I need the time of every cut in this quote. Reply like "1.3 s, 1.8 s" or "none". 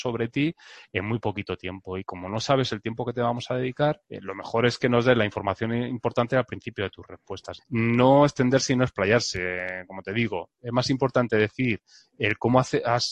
4.0 s, 7.6 s